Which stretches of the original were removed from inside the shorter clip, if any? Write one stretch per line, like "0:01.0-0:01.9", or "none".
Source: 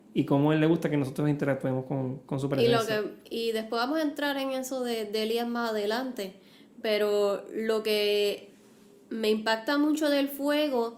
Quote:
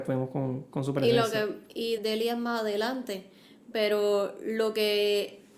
0:03.5-0:05.1